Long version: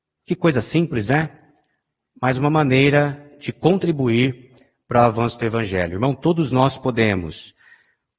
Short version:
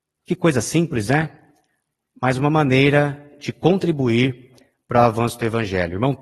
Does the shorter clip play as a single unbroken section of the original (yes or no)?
yes